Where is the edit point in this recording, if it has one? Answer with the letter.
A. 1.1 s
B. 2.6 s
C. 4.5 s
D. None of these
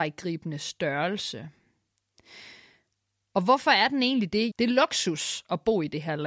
C